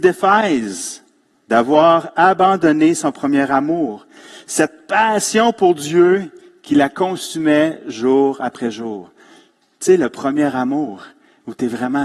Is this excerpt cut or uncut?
uncut